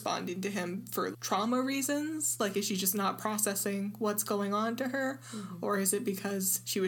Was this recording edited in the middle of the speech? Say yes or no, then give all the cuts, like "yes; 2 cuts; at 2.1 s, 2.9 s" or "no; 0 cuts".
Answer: yes; 1 cut; at 1.1 s